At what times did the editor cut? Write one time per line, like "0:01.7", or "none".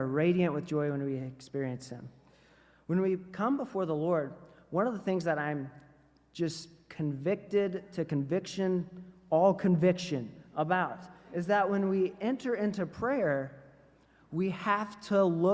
none